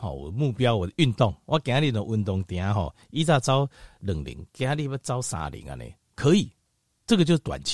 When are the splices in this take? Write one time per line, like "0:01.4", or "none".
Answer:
none